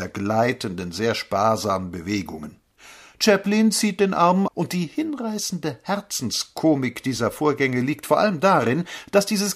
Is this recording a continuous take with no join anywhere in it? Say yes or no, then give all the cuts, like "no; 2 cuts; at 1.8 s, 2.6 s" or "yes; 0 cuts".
no; 1 cut; at 4.5 s